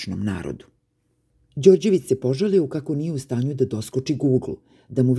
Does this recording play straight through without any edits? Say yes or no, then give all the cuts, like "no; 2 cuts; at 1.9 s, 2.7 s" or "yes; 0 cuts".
yes; 0 cuts